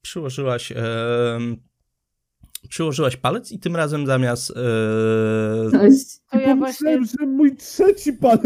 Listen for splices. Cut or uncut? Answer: cut